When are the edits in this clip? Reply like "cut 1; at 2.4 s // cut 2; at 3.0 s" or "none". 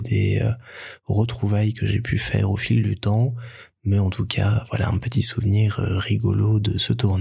none